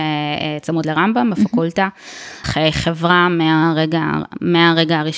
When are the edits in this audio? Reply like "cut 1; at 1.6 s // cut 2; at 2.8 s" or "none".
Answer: cut 1; at 2.4 s